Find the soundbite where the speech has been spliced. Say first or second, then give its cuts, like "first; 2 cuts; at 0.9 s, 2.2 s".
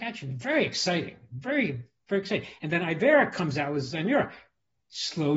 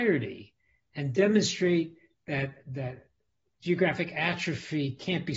second; 1 cut; at 2.7 s